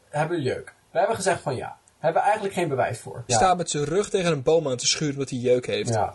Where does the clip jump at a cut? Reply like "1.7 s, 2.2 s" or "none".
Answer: 3.3 s